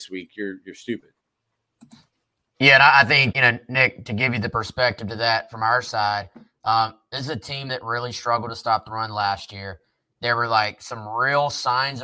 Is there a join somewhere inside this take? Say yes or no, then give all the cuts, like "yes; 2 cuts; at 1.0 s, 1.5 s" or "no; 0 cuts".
yes; 1 cut; at 3.3 s